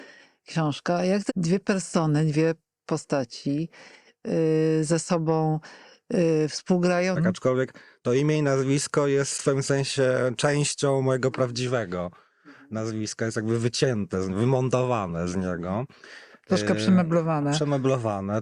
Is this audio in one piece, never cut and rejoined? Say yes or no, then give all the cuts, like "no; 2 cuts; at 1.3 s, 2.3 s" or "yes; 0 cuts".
no; 2 cuts; at 1.3 s, 7.1 s